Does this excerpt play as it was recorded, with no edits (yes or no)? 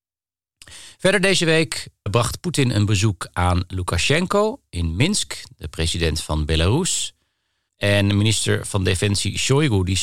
no